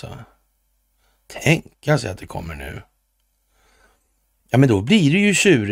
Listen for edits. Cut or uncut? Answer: uncut